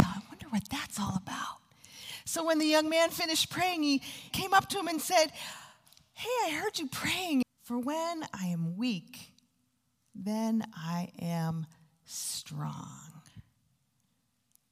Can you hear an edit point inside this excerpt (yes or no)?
yes